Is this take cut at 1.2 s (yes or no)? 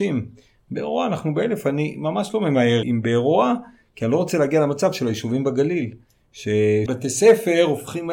no